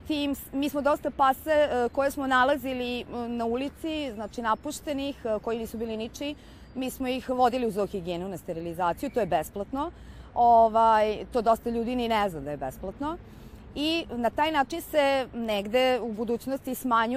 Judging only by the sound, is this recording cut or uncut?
uncut